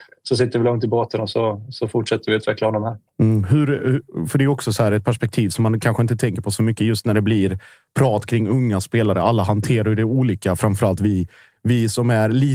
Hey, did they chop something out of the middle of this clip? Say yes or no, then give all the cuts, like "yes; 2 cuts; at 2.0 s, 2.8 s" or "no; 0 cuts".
no; 0 cuts